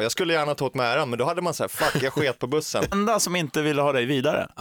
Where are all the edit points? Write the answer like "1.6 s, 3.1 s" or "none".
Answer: 2.9 s